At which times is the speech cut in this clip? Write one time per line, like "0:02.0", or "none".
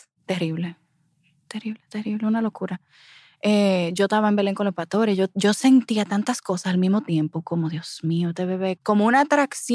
0:08.8